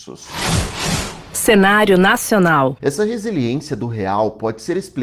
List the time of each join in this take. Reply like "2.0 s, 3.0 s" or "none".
2.8 s